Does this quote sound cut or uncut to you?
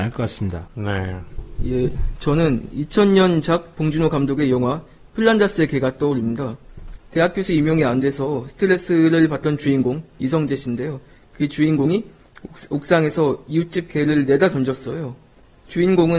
uncut